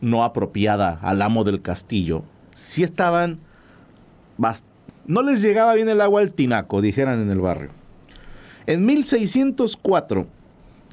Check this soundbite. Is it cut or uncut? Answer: cut